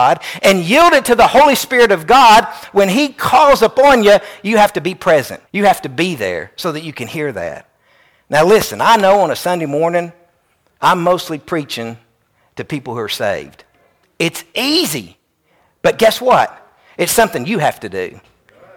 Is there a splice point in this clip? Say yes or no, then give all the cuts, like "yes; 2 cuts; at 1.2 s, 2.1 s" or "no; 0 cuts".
yes; 2 cuts; at 5.5 s, 14.0 s